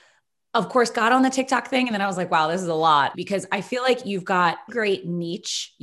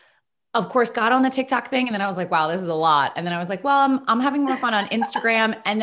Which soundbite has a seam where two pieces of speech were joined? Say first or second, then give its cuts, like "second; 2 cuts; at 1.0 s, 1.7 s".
first; 2 cuts; at 3.1 s, 4.7 s